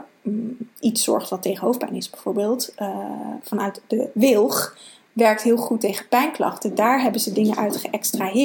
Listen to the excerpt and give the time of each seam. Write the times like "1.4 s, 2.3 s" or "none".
none